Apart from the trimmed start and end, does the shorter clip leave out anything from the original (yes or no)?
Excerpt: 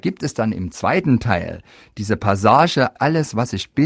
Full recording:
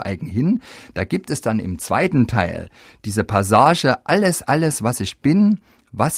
yes